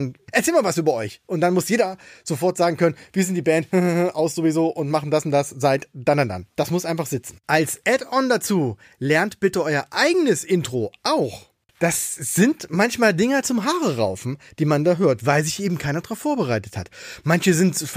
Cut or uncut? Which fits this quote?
cut